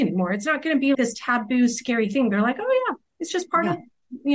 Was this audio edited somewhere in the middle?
yes; 1 cut; at 0.9 s

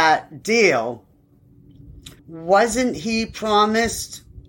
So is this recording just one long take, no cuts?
no; 1 cut; at 2.2 s

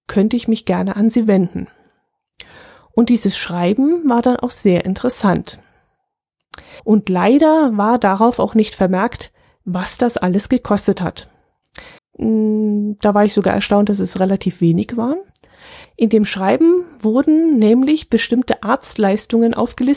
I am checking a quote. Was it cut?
yes; 3 cuts; at 6.8 s, 12.0 s, 15.8 s

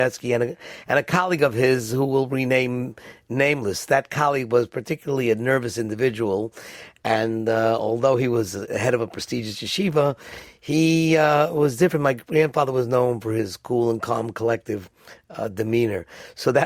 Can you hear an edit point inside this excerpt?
no; 0 cuts

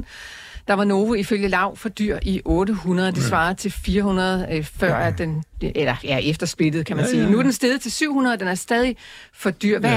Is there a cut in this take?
no; 0 cuts

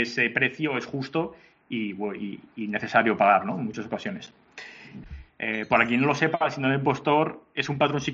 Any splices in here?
yes; 1 cut; at 5.0 s

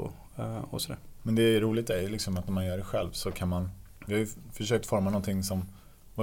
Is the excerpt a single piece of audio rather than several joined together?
yes; 0 cuts

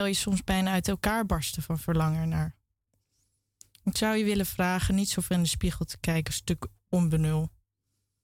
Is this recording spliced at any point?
no; 0 cuts

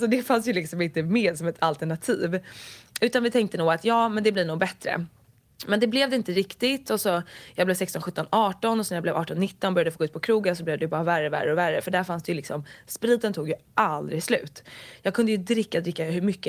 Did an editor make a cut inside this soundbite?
no; 0 cuts

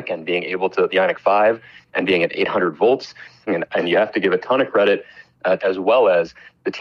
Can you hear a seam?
yes; 2 cuts; at 3.5 s, 5.6 s

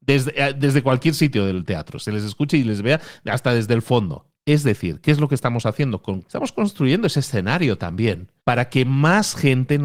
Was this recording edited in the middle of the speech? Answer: yes; 2 cuts; at 6.3 s, 8.4 s

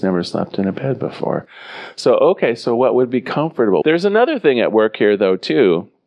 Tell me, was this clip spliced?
yes; 1 cut; at 3.8 s

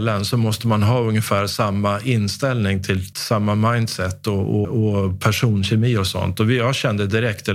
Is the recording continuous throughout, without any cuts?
no; 2 cuts; at 3.1 s, 4.6 s

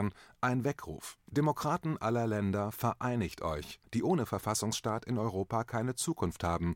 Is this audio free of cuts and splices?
no; 2 cuts; at 1.2 s, 3.8 s

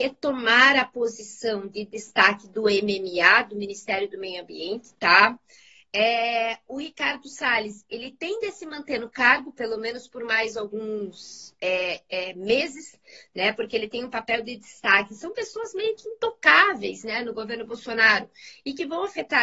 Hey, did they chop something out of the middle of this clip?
no; 0 cuts

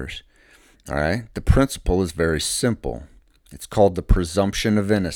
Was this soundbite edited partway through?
no; 0 cuts

